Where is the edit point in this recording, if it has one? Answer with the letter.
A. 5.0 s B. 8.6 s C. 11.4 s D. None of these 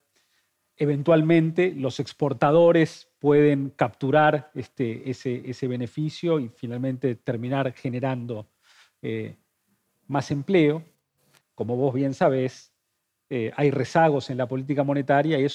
C